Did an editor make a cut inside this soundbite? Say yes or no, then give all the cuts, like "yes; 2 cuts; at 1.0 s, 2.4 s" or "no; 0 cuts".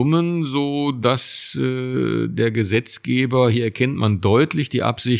no; 0 cuts